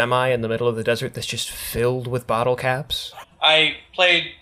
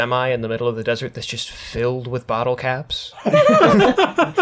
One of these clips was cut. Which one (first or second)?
first